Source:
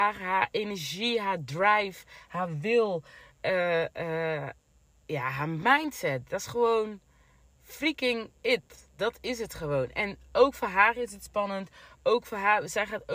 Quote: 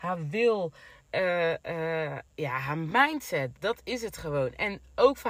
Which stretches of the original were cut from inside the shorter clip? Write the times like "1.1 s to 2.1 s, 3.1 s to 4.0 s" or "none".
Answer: 4.6 s to 5.0 s, 6.3 s to 8.9 s